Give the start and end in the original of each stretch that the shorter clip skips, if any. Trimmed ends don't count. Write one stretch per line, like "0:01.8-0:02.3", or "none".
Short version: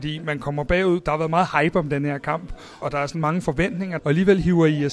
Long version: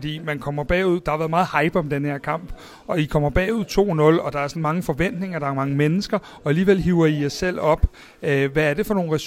0:02.8-0:04.2
0:05.4-0:06.4